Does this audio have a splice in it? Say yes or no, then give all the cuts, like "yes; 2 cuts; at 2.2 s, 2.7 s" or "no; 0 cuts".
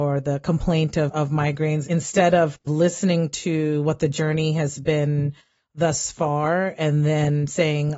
yes; 1 cut; at 1.8 s